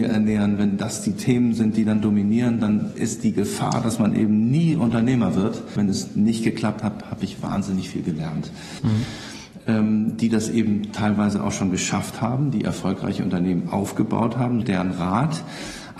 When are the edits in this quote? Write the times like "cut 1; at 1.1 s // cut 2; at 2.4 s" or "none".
cut 1; at 5.8 s // cut 2; at 8.8 s // cut 3; at 14.6 s